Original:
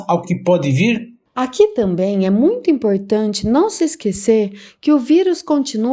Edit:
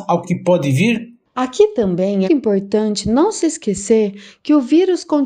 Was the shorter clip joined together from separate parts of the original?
yes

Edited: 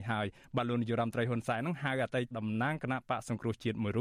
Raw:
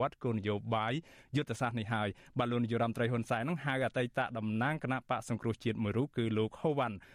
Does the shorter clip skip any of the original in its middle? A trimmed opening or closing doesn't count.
yes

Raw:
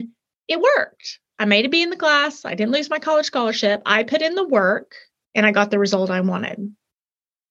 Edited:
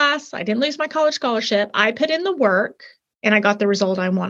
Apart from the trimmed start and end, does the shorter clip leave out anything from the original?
no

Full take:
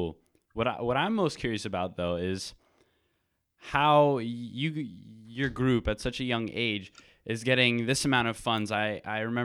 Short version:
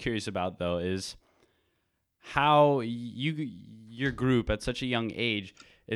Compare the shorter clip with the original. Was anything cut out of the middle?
no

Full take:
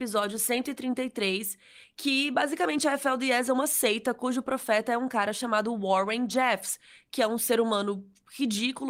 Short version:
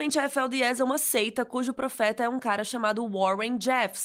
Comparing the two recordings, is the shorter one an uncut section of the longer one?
yes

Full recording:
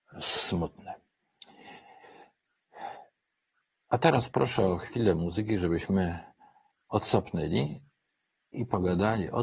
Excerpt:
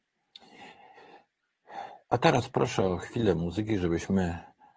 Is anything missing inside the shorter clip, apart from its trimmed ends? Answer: yes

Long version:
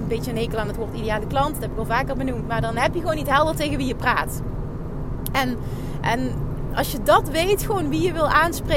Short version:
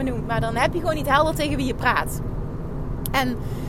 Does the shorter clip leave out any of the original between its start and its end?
no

